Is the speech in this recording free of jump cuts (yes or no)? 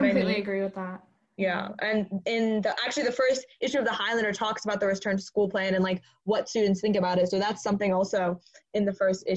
yes